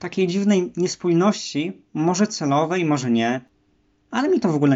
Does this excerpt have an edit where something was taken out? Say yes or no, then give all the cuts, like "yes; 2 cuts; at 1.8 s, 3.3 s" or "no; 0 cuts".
no; 0 cuts